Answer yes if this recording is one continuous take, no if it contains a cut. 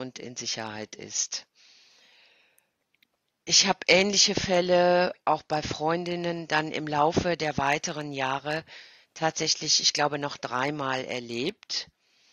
yes